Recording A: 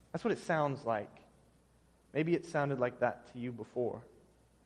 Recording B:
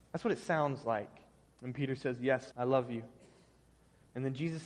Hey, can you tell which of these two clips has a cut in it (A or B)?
B